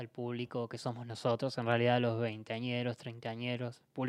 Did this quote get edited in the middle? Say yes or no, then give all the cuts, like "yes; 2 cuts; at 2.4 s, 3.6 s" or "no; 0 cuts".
no; 0 cuts